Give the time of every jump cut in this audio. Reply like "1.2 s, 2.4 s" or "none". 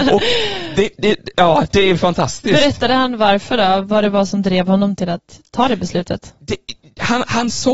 none